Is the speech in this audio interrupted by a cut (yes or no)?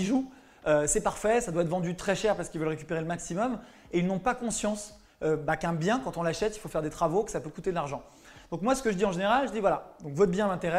no